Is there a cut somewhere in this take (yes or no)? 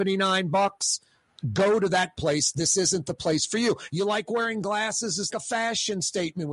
yes